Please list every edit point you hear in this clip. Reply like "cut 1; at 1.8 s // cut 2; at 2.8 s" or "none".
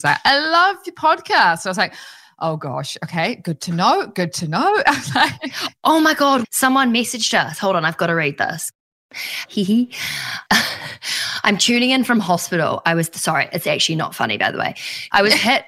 cut 1; at 6.4 s // cut 2; at 9.4 s